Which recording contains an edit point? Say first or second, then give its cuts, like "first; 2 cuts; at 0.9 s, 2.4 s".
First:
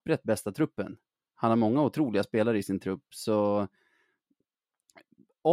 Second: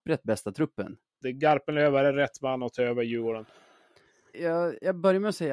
second; 2 cuts; at 1.2 s, 4.3 s